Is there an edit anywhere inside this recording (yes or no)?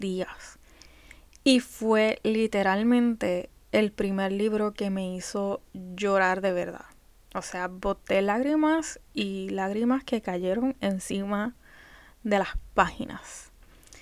no